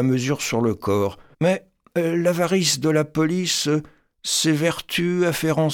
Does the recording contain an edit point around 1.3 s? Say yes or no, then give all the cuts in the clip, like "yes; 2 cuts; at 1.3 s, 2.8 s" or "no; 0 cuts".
yes; 1 cut; at 1.3 s